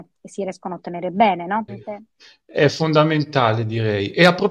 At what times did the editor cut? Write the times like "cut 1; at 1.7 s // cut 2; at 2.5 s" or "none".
cut 1; at 1.7 s